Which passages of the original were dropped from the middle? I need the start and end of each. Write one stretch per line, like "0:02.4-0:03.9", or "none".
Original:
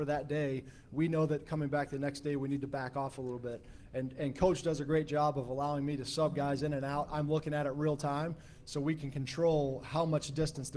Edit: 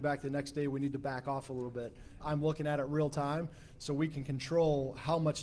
0:03.9-0:07.1